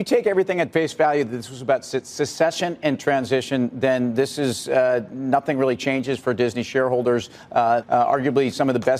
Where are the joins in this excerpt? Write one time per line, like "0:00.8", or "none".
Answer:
0:07.8